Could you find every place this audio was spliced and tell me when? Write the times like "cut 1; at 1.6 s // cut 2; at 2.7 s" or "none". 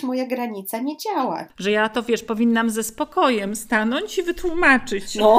cut 1; at 1.5 s